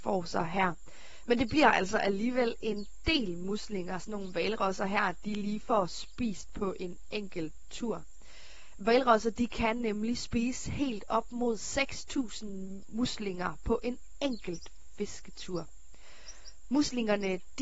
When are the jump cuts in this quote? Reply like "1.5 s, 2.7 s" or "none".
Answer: none